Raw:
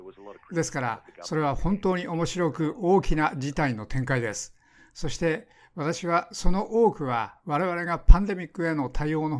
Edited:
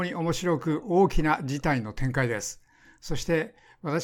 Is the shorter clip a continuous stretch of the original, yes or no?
yes